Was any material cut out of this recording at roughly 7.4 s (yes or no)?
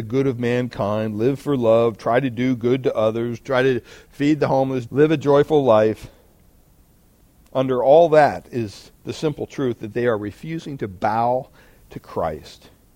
no